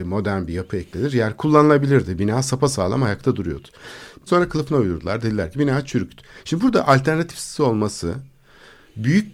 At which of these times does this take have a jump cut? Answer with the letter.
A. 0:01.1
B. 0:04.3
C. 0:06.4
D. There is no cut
B